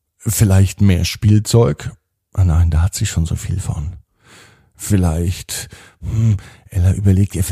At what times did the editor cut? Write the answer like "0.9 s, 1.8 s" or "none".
none